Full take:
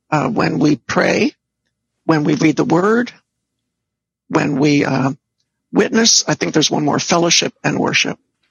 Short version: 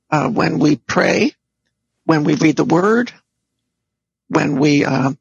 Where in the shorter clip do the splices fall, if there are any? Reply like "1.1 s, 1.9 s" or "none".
none